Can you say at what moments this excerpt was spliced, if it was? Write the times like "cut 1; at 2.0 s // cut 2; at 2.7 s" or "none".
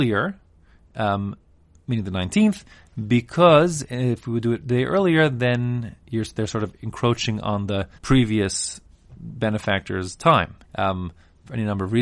cut 1; at 8.0 s // cut 2; at 10.6 s